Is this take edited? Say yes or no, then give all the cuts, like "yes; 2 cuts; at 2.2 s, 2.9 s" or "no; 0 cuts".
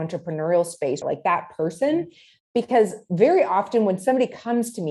yes; 1 cut; at 1.0 s